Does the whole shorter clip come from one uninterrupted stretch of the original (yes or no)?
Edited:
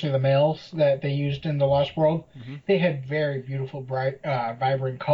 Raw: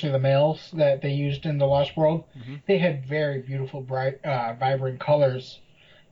yes